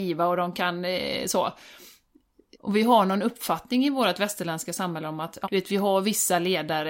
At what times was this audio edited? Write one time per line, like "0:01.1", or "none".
0:02.5
0:05.4